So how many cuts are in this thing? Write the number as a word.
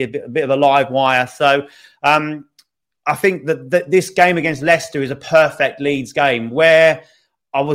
zero